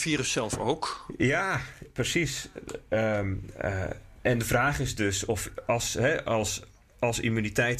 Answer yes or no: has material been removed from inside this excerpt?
no